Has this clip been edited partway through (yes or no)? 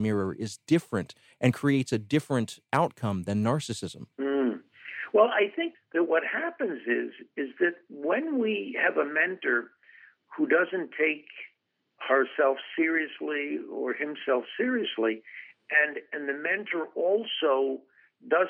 yes